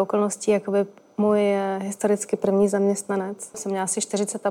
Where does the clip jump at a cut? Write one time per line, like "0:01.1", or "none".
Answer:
0:03.5